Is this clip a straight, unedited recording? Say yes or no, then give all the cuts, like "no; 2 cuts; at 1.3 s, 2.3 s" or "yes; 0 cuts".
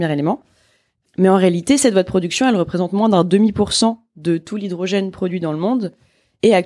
yes; 0 cuts